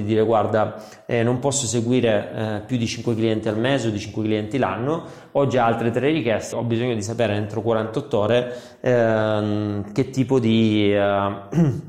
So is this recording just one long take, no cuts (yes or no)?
no